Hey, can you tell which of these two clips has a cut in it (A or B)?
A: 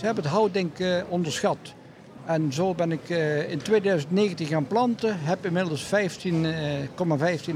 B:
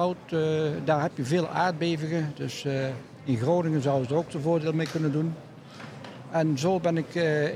A